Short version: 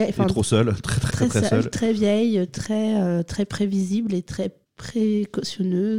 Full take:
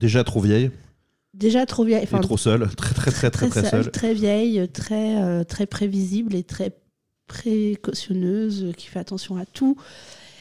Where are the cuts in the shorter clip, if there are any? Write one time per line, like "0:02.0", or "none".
0:01.1
0:04.6